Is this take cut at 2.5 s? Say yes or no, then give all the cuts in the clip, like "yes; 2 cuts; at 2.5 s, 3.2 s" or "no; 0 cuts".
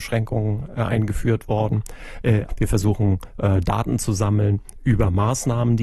yes; 1 cut; at 2.5 s